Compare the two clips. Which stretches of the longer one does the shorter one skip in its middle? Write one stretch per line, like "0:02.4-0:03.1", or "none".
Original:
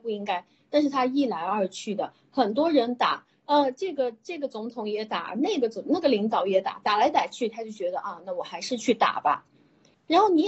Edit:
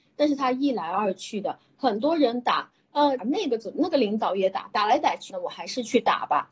0:03.7-0:05.3
0:07.4-0:08.2